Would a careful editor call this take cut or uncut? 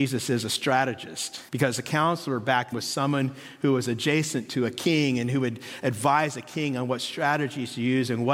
cut